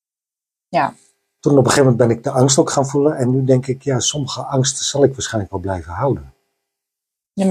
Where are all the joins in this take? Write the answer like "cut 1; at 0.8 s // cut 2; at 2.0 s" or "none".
cut 1; at 1.4 s